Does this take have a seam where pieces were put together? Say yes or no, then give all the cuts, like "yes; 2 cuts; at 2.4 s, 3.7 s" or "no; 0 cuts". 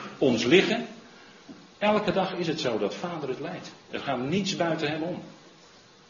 no; 0 cuts